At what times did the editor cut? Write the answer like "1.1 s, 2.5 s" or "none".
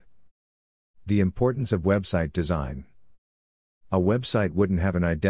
none